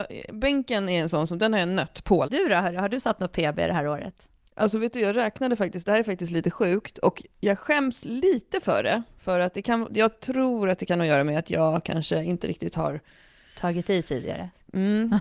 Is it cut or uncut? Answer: cut